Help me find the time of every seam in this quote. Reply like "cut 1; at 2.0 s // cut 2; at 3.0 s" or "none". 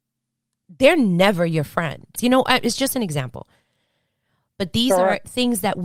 cut 1; at 2.2 s